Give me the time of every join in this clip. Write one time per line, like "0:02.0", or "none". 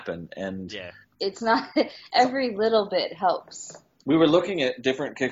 0:01.0